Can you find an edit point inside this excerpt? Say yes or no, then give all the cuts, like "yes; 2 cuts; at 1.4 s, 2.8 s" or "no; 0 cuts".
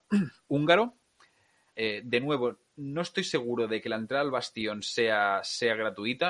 yes; 1 cut; at 1.7 s